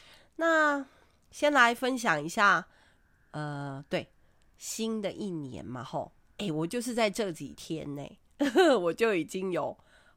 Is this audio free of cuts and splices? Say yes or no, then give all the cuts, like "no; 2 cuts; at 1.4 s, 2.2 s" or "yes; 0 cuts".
yes; 0 cuts